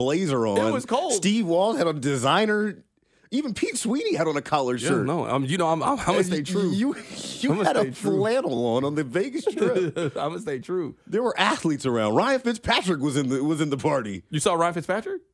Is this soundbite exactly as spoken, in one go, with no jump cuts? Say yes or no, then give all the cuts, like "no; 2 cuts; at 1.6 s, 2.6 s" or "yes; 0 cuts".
yes; 0 cuts